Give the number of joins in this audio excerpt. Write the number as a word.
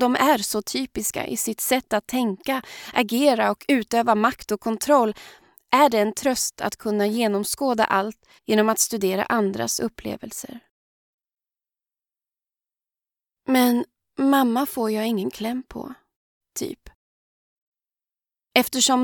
two